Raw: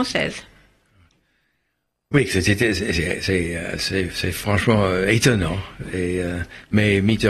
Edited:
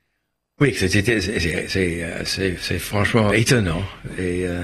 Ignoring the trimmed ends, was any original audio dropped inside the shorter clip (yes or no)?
yes